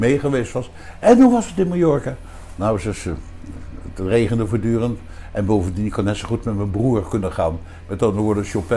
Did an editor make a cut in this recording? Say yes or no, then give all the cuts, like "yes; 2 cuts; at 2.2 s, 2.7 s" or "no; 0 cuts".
no; 0 cuts